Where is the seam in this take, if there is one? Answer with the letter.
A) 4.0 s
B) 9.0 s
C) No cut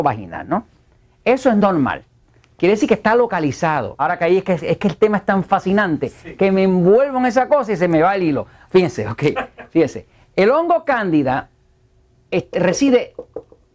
A